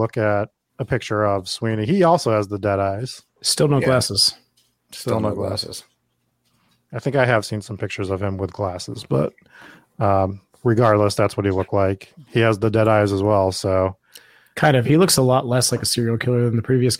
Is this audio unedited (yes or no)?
yes